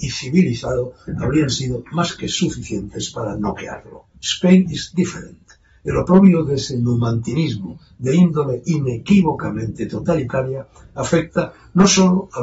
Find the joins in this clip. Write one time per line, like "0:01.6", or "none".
0:04.1